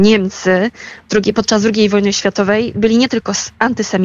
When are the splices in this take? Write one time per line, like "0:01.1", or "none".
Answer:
none